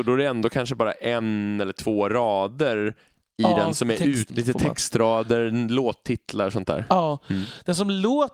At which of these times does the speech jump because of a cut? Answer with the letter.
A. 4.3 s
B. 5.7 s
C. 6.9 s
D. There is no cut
A